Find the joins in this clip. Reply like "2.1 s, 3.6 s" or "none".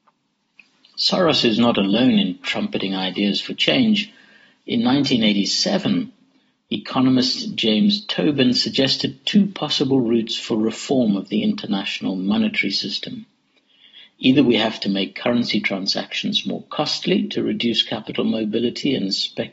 none